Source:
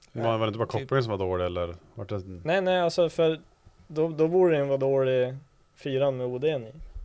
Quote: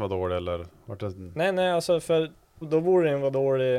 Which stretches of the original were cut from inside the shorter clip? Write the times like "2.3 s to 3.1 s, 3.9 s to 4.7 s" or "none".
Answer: 3.7 s to 4.1 s